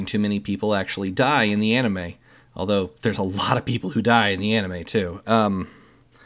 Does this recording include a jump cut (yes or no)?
yes